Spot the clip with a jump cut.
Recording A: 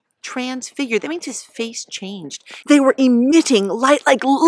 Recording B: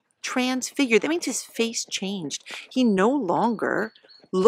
A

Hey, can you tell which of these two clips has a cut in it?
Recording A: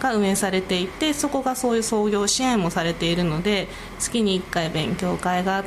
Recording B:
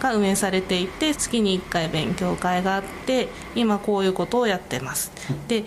B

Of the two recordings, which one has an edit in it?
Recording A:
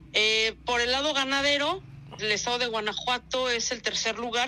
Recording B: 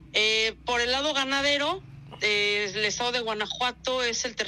A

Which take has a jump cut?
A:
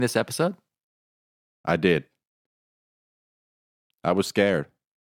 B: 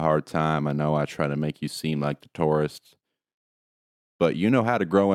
A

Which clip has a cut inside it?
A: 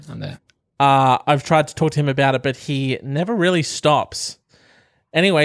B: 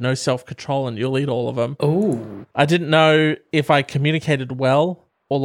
B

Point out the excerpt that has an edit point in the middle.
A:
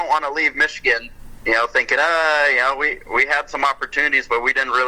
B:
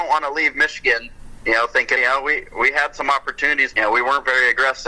B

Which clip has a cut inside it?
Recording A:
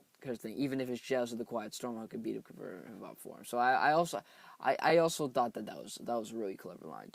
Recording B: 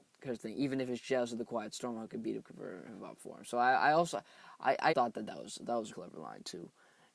B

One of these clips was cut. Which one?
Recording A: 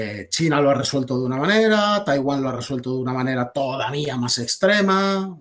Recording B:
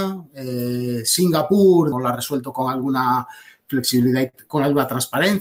B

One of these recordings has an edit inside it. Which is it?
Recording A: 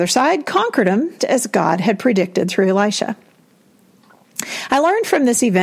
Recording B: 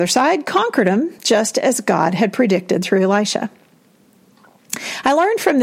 A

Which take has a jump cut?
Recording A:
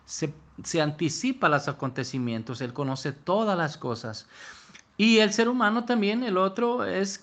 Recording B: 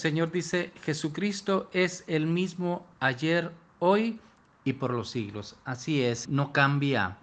B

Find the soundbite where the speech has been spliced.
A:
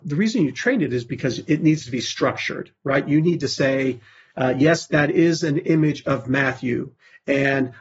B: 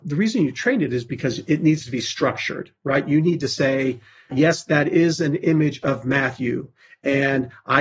B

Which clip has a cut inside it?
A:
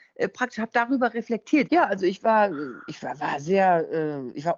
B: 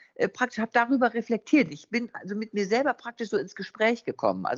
A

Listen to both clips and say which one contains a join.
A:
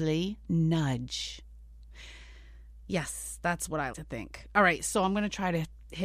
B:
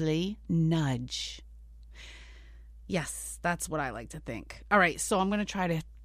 A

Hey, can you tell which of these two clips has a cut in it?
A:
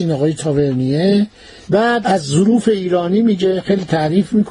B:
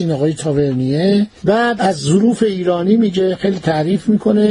B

